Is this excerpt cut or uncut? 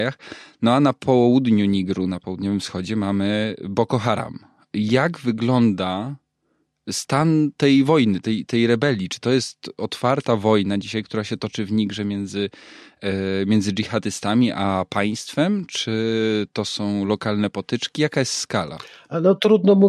uncut